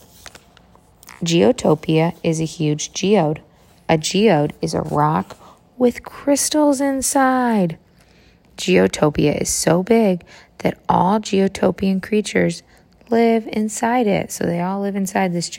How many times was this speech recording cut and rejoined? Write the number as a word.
zero